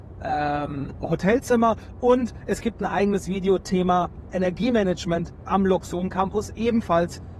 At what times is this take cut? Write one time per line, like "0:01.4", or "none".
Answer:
none